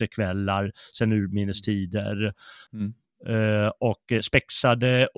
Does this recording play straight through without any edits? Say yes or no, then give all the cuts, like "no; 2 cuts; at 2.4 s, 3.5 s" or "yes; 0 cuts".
no; 1 cut; at 2.7 s